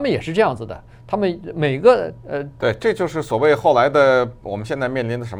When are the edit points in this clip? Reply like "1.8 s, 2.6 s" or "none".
2.6 s